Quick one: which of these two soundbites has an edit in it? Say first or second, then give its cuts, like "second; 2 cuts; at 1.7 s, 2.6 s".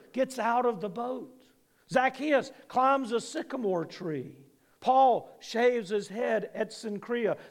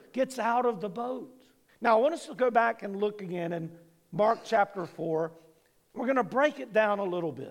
second; 1 cut; at 1.7 s